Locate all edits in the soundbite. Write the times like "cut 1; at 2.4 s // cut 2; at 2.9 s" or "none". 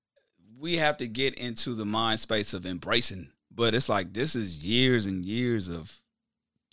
cut 1; at 3.3 s